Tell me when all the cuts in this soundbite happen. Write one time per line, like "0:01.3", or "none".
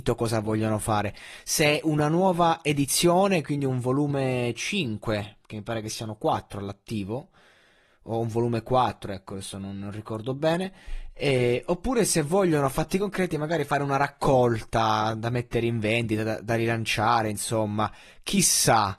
none